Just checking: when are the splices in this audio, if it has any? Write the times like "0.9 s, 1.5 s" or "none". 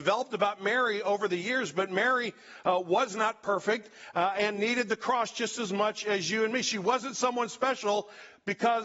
none

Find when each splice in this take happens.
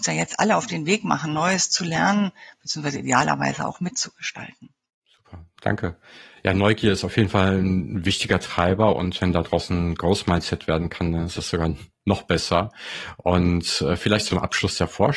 4.9 s

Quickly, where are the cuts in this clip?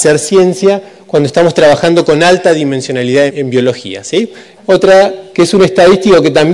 3.3 s, 4.6 s

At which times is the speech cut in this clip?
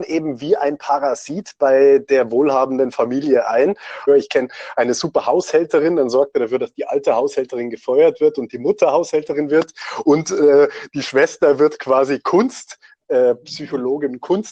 4.1 s

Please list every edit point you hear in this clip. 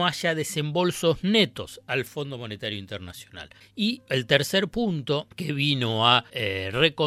none

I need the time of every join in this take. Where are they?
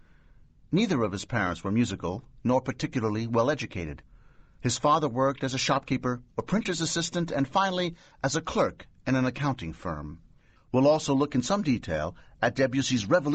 6.3 s, 10.5 s

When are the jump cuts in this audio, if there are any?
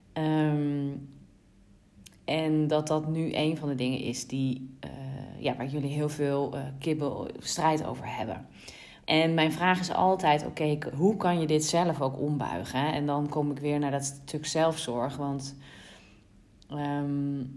9.0 s

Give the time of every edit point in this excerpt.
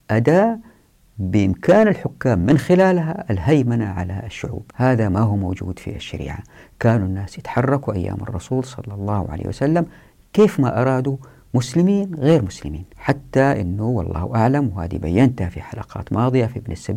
4.7 s, 12.9 s

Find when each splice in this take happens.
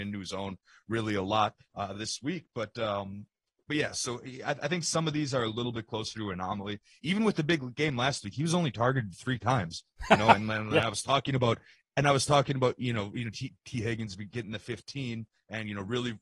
none

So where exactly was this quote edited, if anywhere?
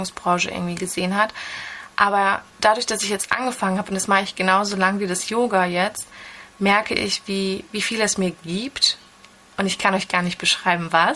none

